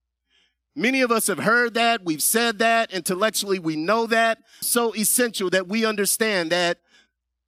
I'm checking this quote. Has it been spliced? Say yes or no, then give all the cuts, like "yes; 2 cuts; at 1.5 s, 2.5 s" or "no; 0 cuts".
yes; 1 cut; at 4.6 s